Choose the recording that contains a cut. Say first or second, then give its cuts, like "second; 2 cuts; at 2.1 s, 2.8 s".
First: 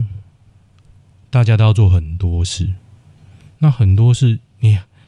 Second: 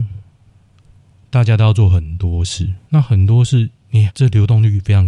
second; 2 cuts; at 2.8 s, 4.1 s